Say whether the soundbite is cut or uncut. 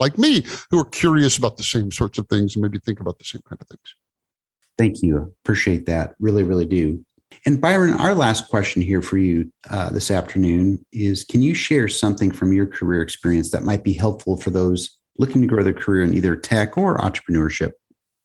uncut